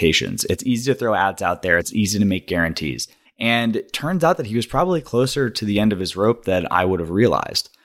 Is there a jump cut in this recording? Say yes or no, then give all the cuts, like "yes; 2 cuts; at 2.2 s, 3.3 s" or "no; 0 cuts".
yes; 2 cuts; at 1.8 s, 3.2 s